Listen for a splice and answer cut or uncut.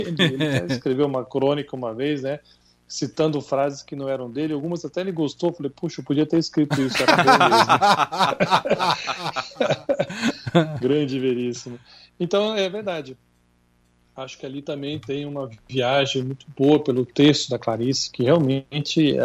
uncut